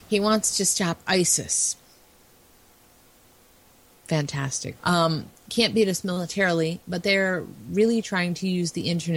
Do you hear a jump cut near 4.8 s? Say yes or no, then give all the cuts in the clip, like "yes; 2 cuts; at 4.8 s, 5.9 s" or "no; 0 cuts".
yes; 1 cut; at 4.8 s